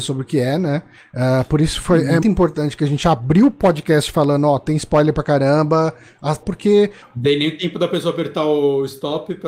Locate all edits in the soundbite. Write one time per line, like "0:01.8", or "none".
0:02.2
0:06.4